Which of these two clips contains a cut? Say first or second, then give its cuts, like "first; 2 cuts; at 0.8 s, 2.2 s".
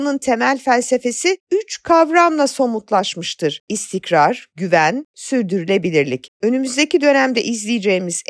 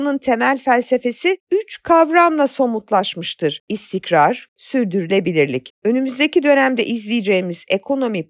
second; 1 cut; at 4.5 s